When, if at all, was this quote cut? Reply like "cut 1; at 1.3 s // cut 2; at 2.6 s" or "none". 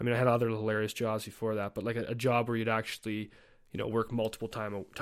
none